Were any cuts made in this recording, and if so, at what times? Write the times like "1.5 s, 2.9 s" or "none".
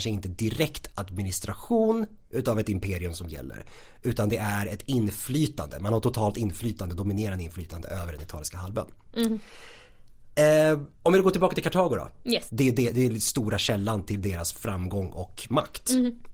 10.9 s, 12.5 s